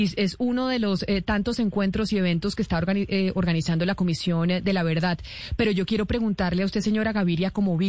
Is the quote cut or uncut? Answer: uncut